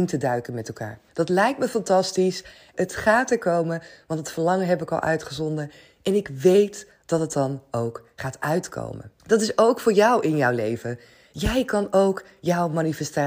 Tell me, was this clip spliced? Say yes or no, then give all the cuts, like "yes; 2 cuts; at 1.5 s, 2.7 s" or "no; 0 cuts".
yes; 3 cuts; at 1.1 s, 2.7 s, 9.2 s